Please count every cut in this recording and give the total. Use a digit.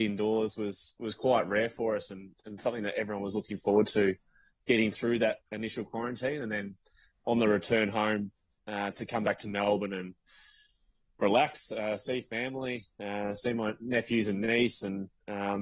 1